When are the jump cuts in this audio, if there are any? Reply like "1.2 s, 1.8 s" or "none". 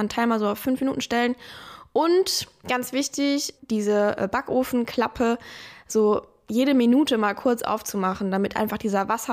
3.6 s